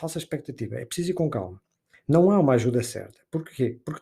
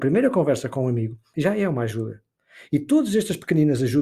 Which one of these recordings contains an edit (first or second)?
second